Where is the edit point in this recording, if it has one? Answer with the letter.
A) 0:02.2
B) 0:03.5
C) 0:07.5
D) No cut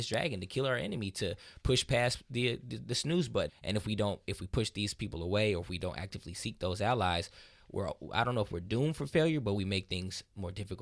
B